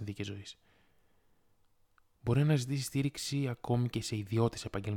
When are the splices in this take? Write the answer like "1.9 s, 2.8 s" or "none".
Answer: none

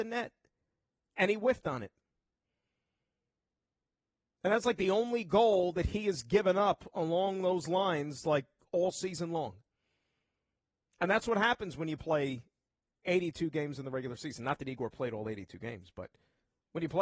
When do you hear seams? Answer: none

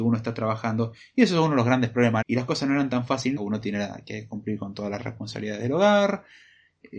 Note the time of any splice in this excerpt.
2.2 s, 3.4 s

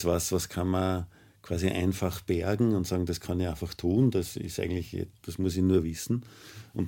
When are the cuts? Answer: none

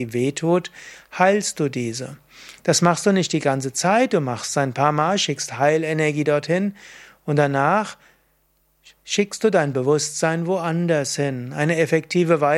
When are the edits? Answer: none

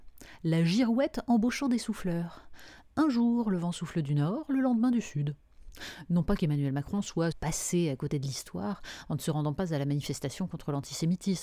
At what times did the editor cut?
7.3 s

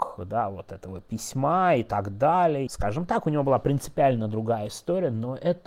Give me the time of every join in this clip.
2.7 s

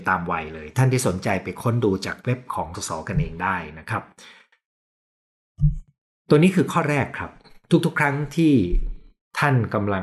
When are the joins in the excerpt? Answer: 2.7 s

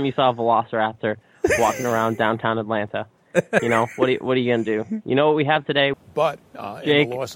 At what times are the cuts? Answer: 3.6 s, 5.9 s

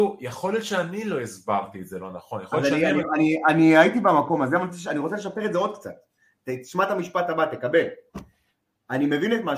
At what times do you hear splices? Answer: none

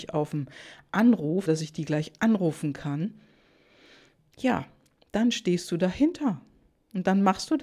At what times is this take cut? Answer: 1.5 s

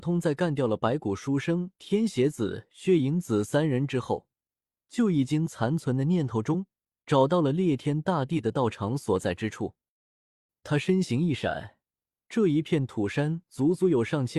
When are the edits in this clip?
12.1 s

